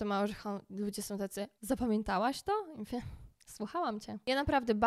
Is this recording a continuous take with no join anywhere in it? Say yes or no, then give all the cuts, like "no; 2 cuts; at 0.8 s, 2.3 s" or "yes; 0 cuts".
no; 1 cut; at 1.6 s